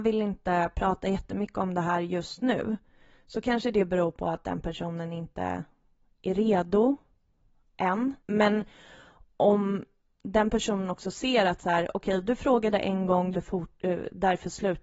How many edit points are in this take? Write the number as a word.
two